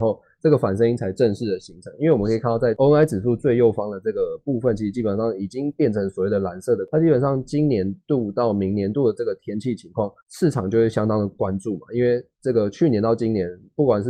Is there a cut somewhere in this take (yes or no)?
yes